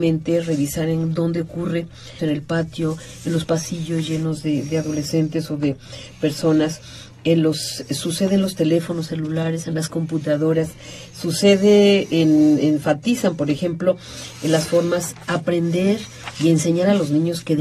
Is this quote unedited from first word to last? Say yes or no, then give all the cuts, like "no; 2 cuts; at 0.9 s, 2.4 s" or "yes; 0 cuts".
no; 1 cut; at 2.2 s